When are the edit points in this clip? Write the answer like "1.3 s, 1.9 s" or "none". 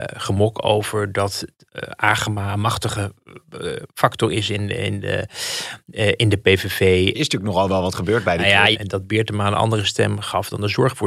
7.1 s, 8.7 s